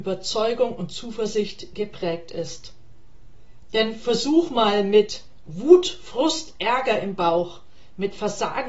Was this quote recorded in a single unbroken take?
no; 1 cut; at 3.7 s

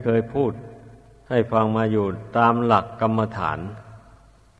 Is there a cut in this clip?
no; 0 cuts

